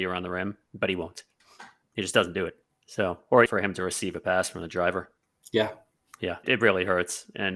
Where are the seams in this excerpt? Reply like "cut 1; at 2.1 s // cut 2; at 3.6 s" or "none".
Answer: cut 1; at 3.5 s // cut 2; at 6.4 s